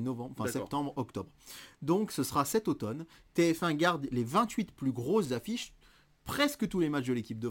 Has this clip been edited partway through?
no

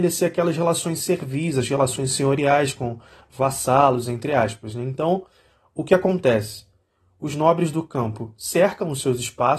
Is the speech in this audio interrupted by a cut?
no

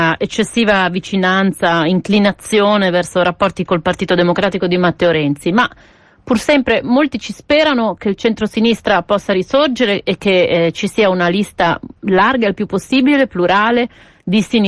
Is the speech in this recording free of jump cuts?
yes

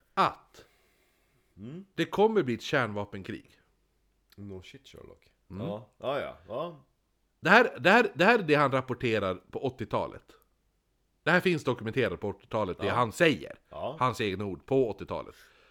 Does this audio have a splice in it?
no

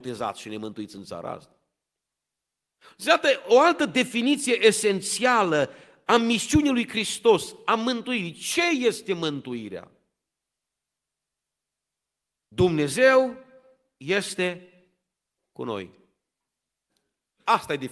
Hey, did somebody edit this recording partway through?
no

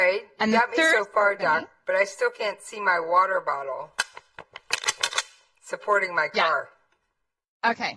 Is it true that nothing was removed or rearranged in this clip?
yes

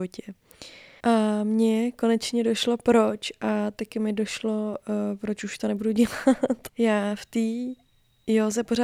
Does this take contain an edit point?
yes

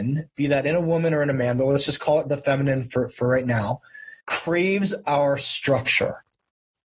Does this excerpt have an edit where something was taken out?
yes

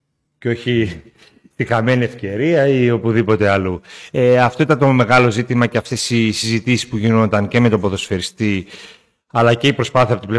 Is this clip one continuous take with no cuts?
yes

